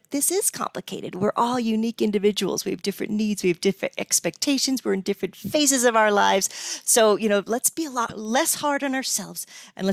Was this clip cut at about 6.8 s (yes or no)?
no